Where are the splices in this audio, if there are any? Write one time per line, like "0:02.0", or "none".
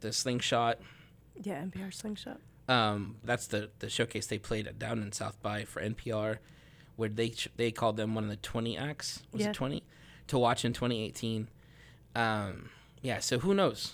0:03.2

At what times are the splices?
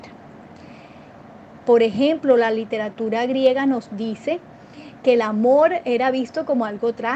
0:01.6
0:05.0

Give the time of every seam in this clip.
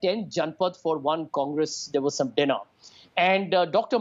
none

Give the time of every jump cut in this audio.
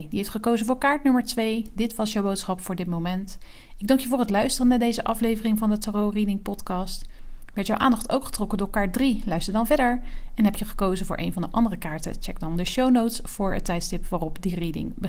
none

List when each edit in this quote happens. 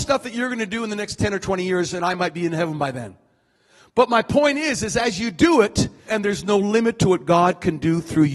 0:06.1

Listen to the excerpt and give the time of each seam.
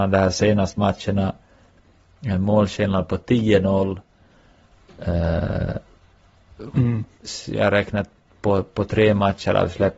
0:06.7

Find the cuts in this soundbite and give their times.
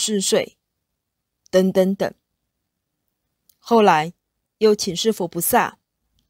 none

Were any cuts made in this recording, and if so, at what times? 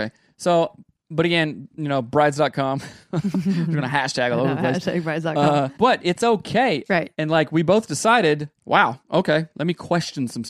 0:05.8
0:06.9
0:08.6

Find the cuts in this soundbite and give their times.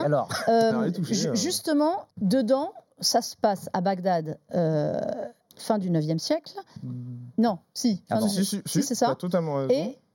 0:02.1

